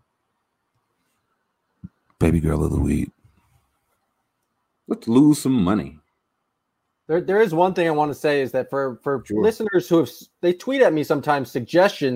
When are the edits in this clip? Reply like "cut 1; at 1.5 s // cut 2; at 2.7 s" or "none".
none